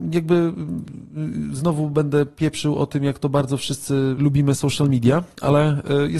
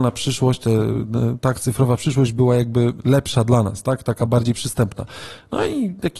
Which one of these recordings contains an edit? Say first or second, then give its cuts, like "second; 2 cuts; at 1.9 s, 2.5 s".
first; 1 cut; at 4.2 s